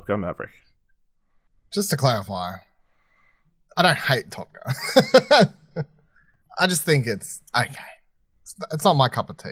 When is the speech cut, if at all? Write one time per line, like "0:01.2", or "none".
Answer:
0:07.5